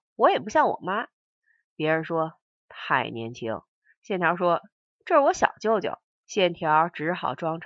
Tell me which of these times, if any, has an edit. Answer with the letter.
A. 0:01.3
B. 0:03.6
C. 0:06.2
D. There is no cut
C